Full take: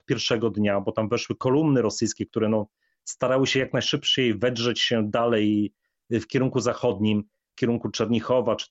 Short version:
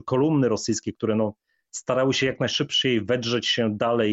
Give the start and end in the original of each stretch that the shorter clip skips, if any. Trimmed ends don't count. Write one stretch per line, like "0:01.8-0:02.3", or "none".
none